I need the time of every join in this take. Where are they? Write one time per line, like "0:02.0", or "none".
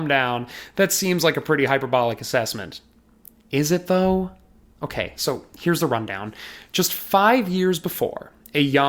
none